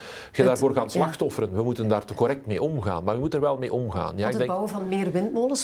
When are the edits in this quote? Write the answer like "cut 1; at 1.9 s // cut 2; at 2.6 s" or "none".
none

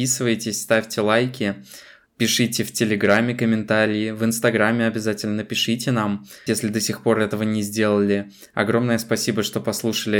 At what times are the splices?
cut 1; at 6.5 s

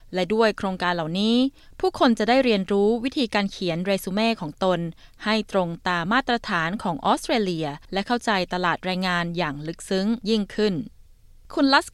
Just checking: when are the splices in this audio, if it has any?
cut 1; at 6.1 s

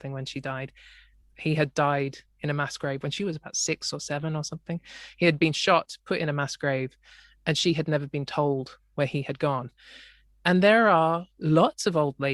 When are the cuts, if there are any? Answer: cut 1; at 1.2 s

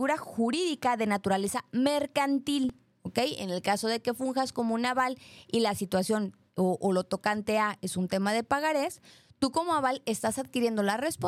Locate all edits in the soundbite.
cut 1; at 2.9 s

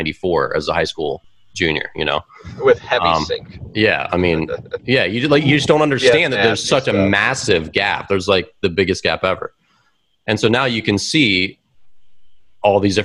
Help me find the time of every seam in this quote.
none

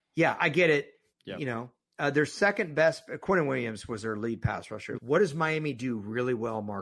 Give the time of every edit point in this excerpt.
cut 1; at 1.1 s // cut 2; at 5.0 s

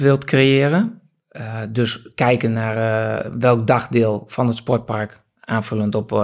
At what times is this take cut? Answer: none

